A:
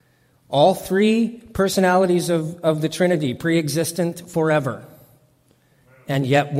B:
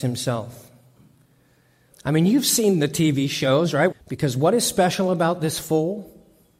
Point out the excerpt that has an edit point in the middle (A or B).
B